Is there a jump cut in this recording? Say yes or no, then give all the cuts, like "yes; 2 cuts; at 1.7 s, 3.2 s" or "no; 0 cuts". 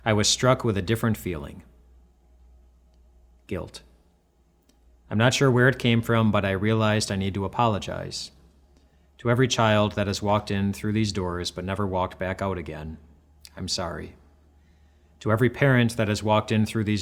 no; 0 cuts